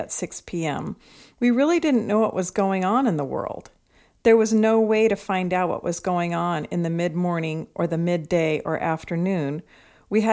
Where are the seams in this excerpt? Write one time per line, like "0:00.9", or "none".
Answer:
none